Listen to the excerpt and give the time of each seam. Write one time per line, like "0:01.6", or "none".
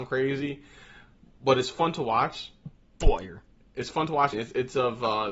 0:04.3